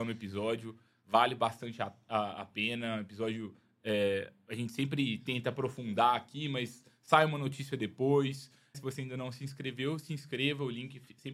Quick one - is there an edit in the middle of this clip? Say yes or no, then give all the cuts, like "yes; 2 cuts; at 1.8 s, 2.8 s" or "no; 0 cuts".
yes; 1 cut; at 8.7 s